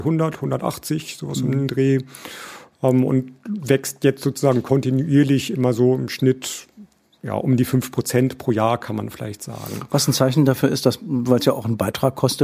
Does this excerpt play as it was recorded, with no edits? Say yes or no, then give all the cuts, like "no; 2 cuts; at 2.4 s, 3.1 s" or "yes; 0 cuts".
yes; 0 cuts